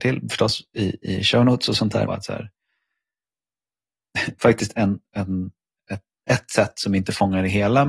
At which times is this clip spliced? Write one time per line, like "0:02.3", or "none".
0:02.1